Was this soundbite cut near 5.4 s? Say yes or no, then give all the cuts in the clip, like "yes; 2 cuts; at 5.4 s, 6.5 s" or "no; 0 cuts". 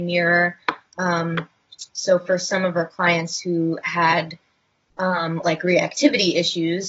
no; 0 cuts